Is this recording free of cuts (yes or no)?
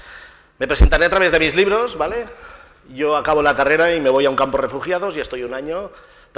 yes